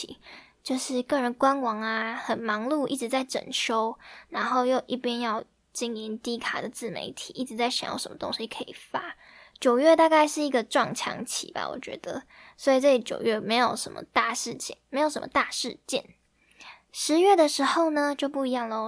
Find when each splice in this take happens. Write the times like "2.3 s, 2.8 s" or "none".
none